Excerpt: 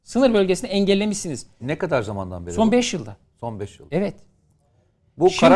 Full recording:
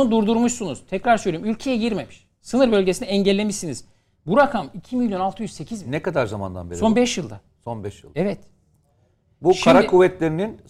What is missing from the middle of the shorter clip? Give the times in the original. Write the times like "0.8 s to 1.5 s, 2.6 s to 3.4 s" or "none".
4.0 s to 5.8 s